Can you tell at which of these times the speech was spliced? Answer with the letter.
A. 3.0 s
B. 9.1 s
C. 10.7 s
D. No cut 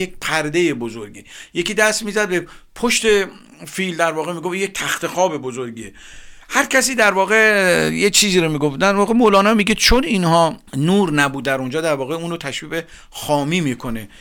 C